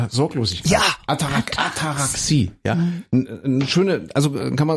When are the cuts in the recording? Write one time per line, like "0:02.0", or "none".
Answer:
none

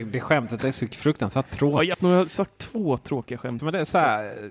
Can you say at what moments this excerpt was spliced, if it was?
0:01.9
0:03.6

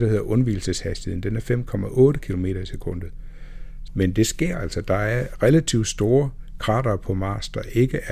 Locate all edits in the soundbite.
0:03.9

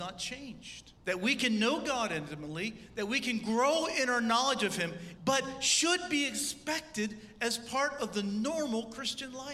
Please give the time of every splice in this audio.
0:01.0
0:05.2

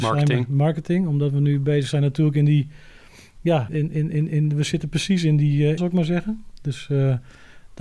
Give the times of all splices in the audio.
0:03.7
0:05.8

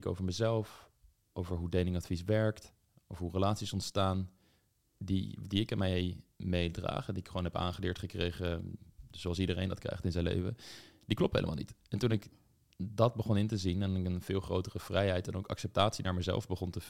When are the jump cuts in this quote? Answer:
none

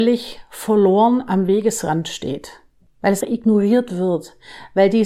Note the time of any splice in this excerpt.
0:03.2

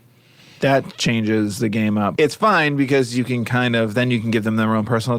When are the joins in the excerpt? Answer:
0:02.2

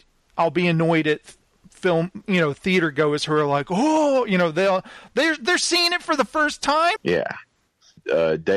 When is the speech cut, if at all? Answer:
0:07.0

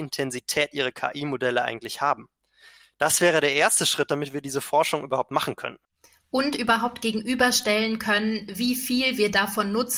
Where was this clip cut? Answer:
none

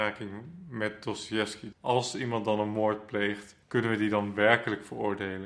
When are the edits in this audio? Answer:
0:01.7
0:03.6

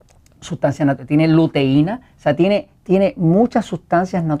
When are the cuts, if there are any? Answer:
none

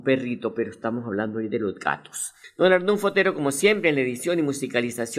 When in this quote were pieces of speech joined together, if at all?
none

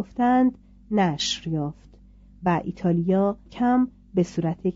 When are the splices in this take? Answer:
0:03.5

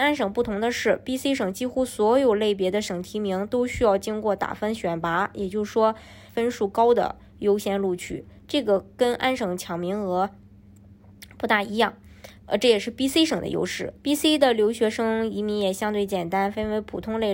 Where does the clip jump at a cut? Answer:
0:06.3
0:12.4
0:14.0

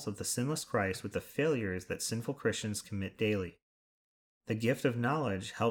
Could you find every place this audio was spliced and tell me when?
none

